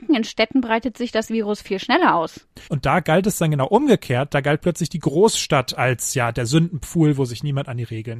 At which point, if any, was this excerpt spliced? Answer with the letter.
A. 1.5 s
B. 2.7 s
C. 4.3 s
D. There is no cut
B